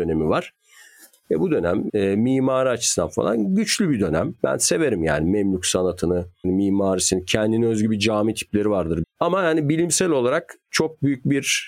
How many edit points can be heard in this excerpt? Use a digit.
3